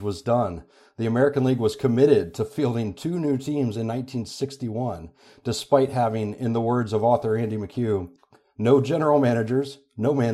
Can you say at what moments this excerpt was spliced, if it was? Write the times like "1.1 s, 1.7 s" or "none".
none

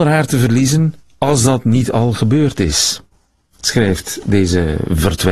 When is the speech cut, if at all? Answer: none

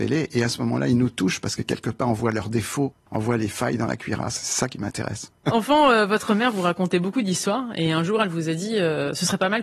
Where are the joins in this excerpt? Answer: none

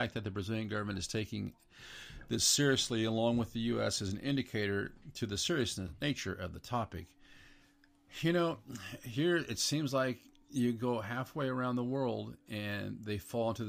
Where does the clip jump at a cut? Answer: none

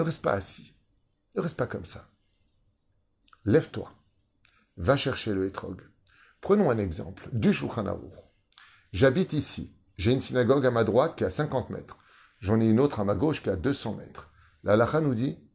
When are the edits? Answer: none

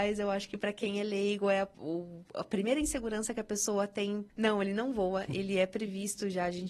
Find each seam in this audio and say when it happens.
1.7 s, 4.3 s

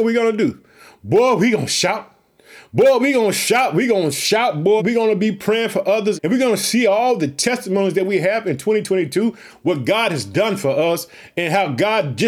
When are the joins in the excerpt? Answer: 4.8 s, 6.2 s

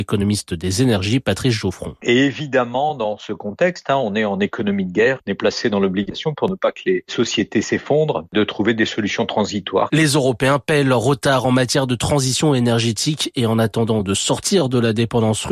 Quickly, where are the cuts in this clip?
2.0 s

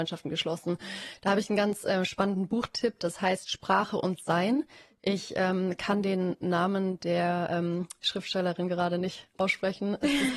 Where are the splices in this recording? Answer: none

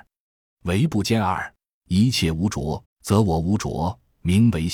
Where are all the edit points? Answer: 1.8 s, 2.8 s

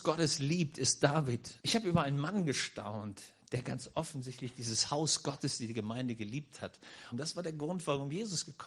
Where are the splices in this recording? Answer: 1.6 s, 7.1 s

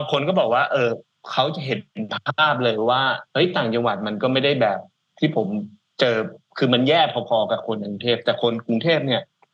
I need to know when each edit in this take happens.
3.3 s

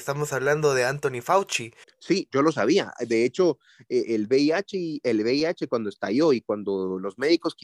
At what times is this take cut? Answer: 1.8 s

